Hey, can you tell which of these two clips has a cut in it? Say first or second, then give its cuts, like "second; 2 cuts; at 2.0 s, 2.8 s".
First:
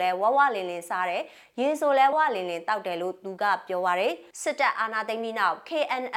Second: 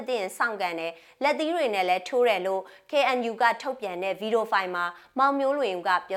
first; 2 cuts; at 2.1 s, 4.3 s